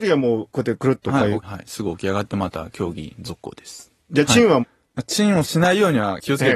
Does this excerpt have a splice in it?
yes; 2 cuts; at 1.4 s, 4.6 s

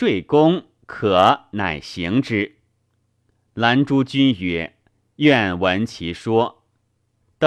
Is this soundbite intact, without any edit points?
yes; 0 cuts

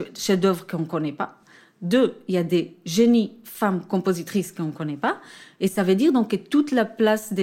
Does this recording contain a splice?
no; 0 cuts

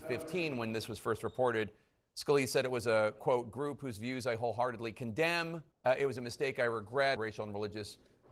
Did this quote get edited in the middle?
yes; 2 cuts; at 5.7 s, 7.2 s

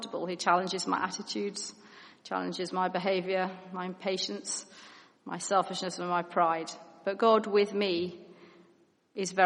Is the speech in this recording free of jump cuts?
yes; 0 cuts

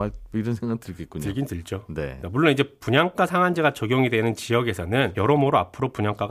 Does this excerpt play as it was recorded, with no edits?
no; 2 cuts; at 2.2 s, 5.1 s

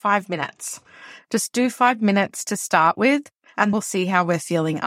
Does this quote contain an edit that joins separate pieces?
yes; 1 cut; at 3.7 s

